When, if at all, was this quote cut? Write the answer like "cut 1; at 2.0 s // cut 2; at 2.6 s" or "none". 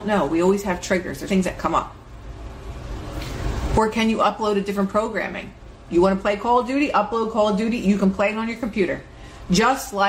cut 1; at 1.3 s